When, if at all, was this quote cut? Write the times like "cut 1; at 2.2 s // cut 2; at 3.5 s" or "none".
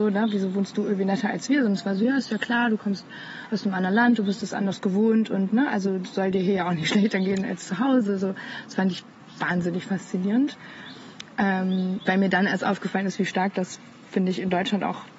none